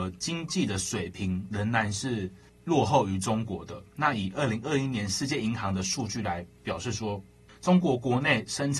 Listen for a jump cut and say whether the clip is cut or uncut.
uncut